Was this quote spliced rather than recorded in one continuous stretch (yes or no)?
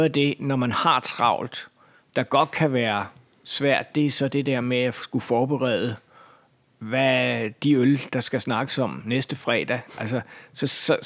no